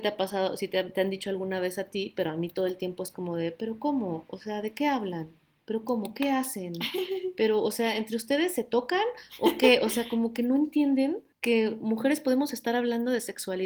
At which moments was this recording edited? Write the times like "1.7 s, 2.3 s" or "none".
11.3 s